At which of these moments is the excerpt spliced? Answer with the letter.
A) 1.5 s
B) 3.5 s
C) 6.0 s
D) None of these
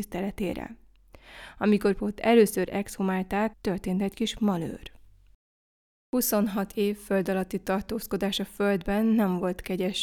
B